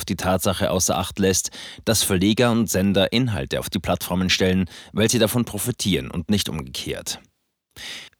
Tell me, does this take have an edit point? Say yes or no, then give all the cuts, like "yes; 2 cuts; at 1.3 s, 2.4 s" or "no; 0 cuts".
no; 0 cuts